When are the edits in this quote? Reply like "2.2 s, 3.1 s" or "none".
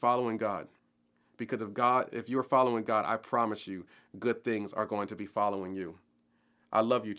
none